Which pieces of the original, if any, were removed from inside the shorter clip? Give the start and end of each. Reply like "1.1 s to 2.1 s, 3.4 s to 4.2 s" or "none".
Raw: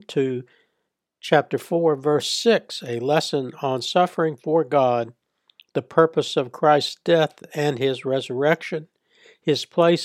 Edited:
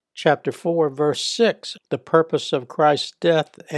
2.8 s to 5.6 s